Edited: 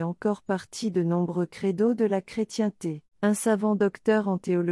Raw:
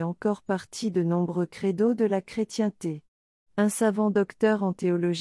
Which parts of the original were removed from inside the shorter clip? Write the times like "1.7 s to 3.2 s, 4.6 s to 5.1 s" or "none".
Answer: 3.1 s to 3.5 s